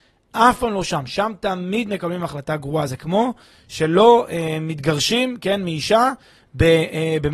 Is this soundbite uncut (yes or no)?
yes